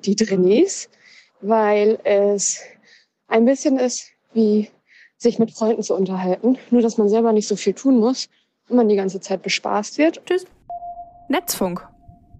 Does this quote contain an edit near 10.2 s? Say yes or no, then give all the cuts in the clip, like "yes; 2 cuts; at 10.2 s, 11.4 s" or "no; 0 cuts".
yes; 1 cut; at 10.2 s